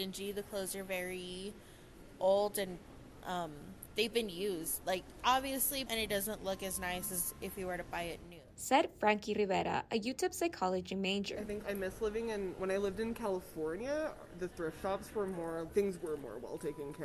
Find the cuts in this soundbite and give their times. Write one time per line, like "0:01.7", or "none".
0:05.9
0:11.6
0:15.7